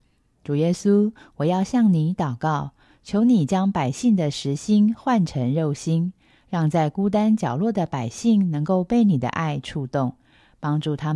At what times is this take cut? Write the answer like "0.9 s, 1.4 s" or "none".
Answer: none